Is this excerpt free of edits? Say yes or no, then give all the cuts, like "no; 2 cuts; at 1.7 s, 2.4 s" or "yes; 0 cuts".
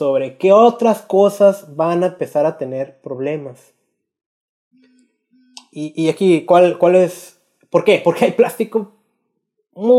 yes; 0 cuts